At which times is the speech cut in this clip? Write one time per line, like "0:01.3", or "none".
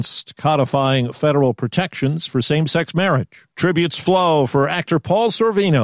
0:03.5